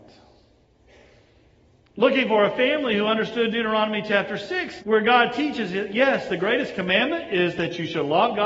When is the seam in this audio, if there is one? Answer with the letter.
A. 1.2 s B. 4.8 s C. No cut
B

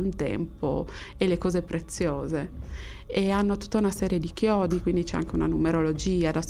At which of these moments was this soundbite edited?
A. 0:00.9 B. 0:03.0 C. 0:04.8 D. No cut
D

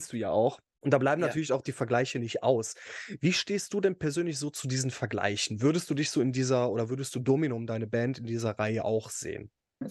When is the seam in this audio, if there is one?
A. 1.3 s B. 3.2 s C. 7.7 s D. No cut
D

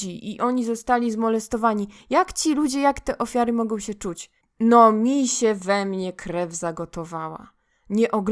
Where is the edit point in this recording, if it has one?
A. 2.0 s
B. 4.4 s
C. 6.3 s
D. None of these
B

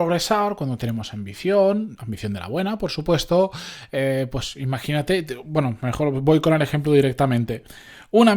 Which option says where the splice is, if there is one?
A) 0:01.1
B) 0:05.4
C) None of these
C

